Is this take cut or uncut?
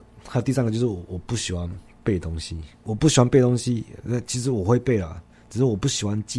uncut